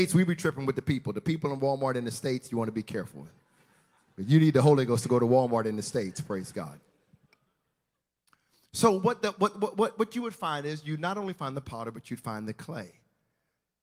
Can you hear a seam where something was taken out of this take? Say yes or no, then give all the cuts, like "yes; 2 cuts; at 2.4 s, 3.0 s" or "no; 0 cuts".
no; 0 cuts